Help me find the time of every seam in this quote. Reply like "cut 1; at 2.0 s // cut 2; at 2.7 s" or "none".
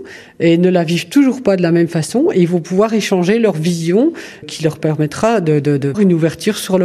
cut 1; at 4.4 s // cut 2; at 5.9 s